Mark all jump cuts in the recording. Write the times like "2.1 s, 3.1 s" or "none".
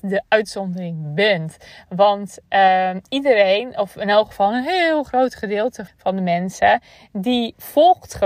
5.9 s